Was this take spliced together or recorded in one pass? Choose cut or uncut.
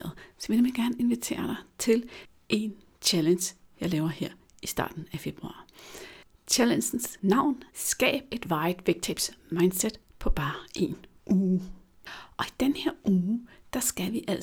cut